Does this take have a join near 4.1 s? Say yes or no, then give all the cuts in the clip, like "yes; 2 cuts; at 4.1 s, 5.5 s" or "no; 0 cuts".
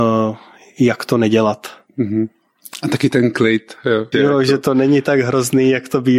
yes; 1 cut; at 4.1 s